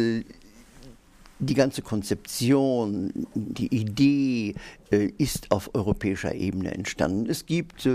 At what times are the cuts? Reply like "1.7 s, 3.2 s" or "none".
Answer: none